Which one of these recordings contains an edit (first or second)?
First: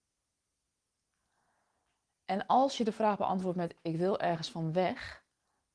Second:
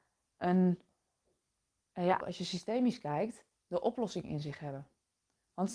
second